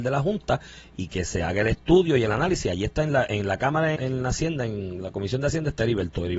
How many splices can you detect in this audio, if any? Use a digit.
1